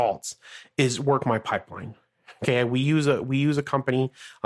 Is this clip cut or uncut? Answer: uncut